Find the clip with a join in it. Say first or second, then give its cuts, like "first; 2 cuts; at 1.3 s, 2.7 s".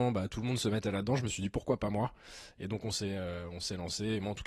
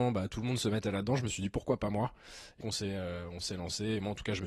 second; 1 cut; at 2.6 s